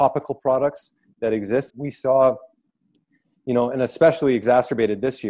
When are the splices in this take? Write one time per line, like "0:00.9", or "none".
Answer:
0:01.7